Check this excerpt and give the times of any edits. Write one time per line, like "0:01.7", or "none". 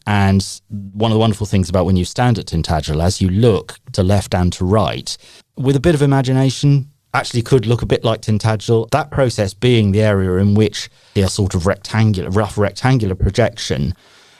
0:05.4
0:08.9
0:11.2